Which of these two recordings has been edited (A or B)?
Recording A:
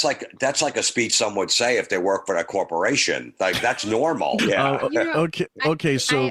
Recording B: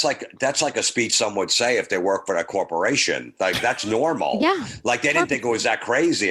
A